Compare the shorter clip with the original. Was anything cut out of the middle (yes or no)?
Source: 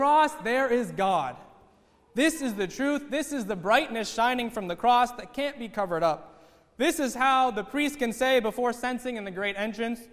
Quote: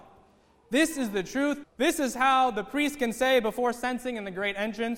yes